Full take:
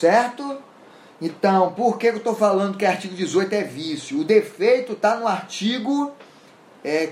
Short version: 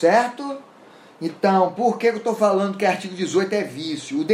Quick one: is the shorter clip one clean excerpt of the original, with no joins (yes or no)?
yes